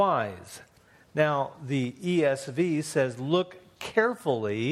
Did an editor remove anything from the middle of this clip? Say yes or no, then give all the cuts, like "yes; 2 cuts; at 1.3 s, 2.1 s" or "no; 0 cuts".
no; 0 cuts